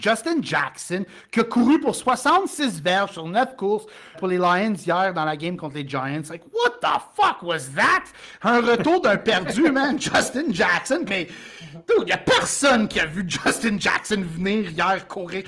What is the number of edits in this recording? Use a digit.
2